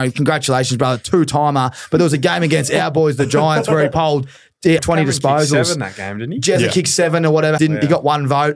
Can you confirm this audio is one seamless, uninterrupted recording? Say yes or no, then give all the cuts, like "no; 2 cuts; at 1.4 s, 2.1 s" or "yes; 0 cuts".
no; 2 cuts; at 4.8 s, 7.6 s